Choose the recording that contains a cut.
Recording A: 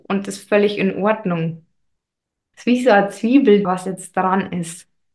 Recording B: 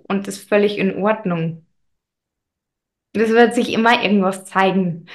A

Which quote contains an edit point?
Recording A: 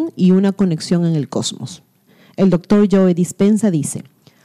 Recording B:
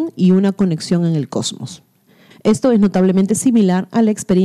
B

